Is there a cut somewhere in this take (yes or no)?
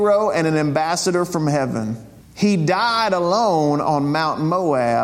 yes